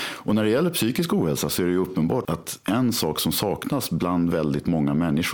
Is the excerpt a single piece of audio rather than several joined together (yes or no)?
no